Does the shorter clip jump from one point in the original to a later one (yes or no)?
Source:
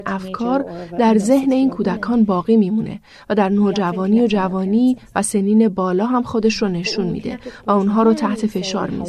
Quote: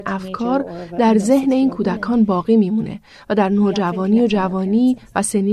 no